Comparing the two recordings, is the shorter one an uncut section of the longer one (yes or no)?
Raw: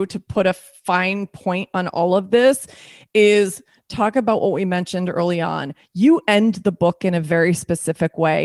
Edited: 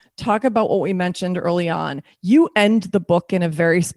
yes